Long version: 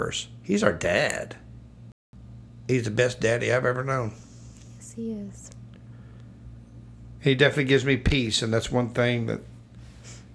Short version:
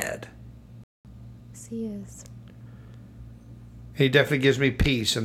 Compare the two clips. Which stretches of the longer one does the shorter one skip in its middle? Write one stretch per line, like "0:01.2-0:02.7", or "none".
0:02.6-0:04.8